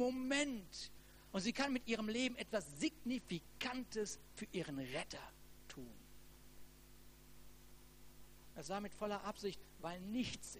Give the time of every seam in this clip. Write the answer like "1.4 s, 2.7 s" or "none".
8.5 s